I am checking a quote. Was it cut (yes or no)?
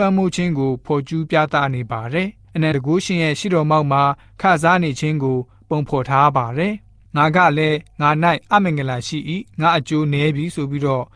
yes